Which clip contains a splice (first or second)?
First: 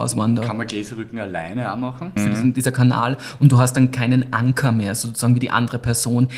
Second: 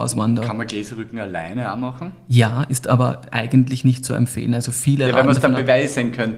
first